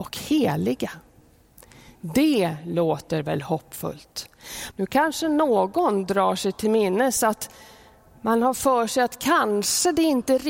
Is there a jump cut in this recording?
yes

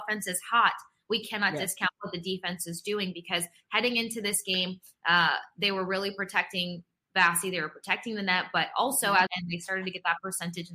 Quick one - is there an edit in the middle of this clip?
yes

